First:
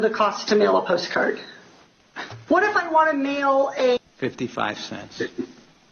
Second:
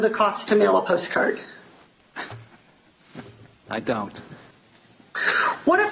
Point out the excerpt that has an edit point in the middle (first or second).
first